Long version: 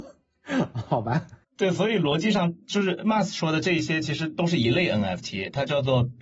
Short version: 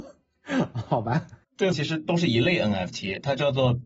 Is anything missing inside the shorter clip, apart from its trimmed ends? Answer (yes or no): yes